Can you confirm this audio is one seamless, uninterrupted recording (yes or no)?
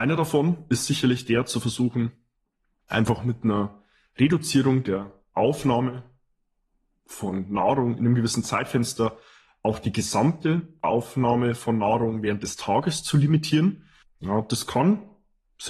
no